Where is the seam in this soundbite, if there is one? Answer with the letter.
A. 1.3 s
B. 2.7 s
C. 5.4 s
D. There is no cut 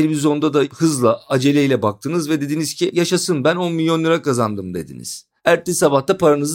C